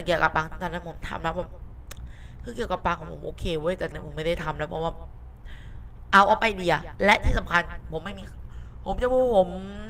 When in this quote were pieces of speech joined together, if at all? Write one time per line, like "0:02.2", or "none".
0:03.9

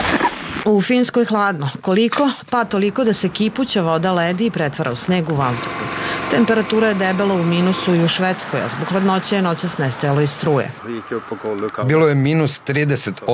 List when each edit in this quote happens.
0:11.8

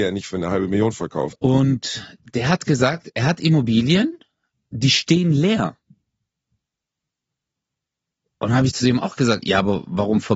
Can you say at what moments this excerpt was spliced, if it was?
0:01.3
0:09.4

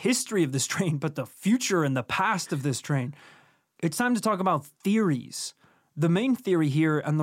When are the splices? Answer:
none

